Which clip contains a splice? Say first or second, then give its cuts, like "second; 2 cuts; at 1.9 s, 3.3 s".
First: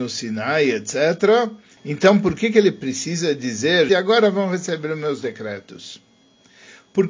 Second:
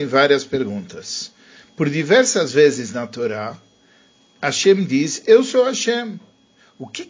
first; 2 cuts; at 1.8 s, 3.9 s